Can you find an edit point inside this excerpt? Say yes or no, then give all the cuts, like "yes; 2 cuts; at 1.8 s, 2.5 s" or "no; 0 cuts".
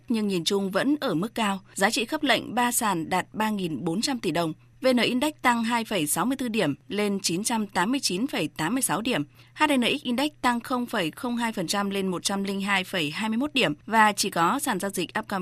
yes; 1 cut; at 4.7 s